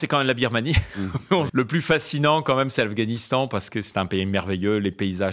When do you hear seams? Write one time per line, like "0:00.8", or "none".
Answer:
0:01.5